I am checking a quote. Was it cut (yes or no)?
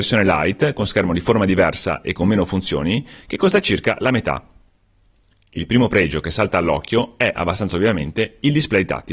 no